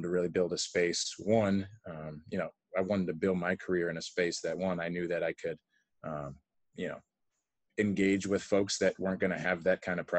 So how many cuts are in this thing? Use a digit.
0